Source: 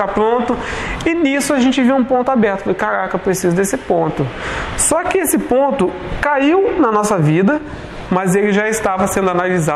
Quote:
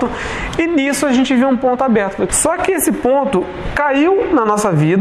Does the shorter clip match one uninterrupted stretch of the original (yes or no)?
no